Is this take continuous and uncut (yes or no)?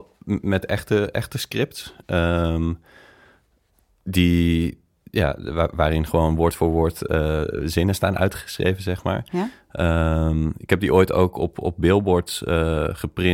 yes